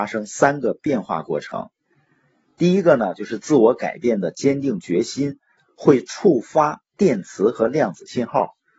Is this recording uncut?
yes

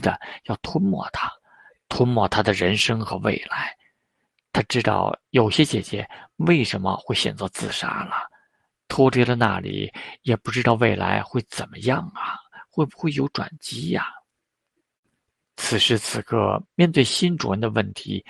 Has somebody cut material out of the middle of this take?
no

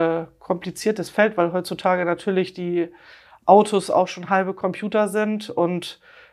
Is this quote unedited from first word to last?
yes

